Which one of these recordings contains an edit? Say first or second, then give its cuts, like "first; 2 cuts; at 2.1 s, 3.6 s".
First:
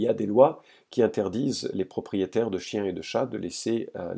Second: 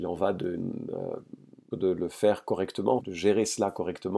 second; 2 cuts; at 1.7 s, 3.0 s